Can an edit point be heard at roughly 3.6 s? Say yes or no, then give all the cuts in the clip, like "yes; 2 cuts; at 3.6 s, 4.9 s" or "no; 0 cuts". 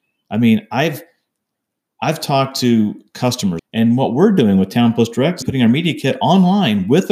yes; 2 cuts; at 3.6 s, 5.4 s